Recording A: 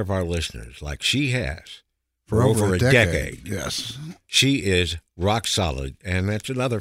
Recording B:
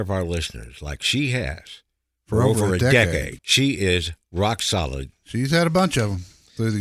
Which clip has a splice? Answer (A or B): B